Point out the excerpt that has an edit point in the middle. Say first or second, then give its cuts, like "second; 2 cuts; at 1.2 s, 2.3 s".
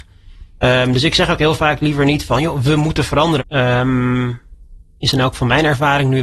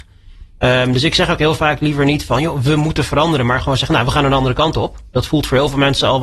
first; 1 cut; at 3.4 s